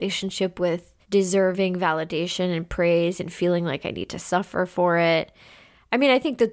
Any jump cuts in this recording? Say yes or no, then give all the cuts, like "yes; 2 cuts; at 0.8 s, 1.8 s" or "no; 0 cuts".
yes; 1 cut; at 1.0 s